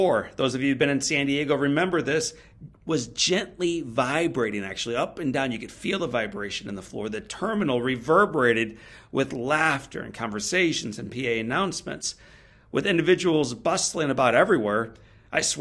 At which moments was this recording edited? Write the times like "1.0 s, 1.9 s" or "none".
none